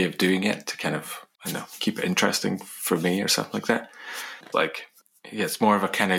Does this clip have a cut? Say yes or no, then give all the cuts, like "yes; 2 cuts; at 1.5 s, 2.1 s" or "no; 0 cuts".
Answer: yes; 2 cuts; at 1.3 s, 4.5 s